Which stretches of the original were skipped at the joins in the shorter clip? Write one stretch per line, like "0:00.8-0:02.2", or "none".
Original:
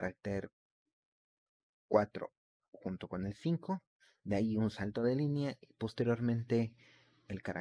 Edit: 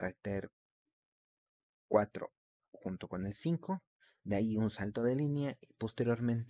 none